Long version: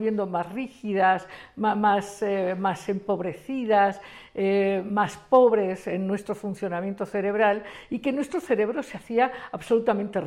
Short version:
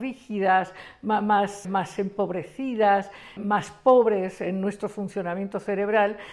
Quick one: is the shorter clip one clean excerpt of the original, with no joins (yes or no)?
no